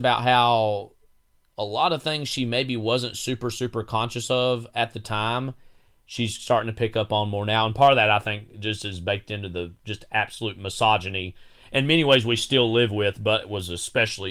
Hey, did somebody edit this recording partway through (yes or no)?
no